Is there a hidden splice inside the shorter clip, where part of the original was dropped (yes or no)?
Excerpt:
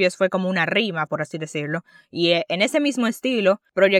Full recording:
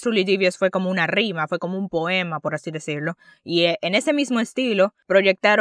yes